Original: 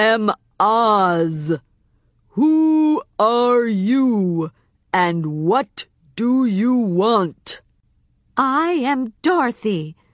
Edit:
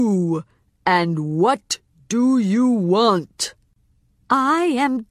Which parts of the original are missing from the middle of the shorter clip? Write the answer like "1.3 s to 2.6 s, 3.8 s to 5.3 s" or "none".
none